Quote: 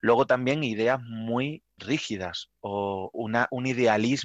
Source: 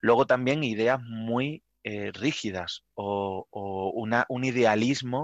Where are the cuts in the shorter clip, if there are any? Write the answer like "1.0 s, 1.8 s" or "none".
1.8 s, 3.1 s